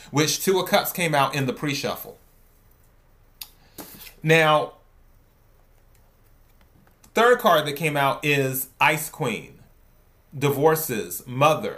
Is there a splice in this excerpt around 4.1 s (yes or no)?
no